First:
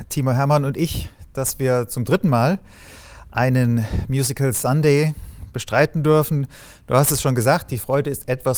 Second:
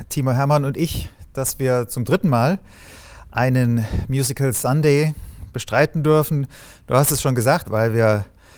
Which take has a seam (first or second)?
second